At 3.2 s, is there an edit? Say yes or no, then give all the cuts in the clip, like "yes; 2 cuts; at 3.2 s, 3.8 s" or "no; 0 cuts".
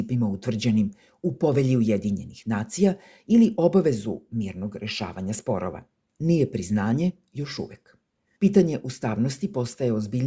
no; 2 cuts; at 6.1 s, 8.2 s